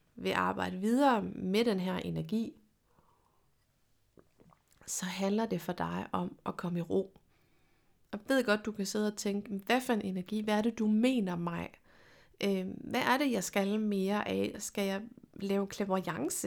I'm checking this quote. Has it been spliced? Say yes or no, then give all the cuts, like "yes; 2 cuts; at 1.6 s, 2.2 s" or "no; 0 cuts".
no; 0 cuts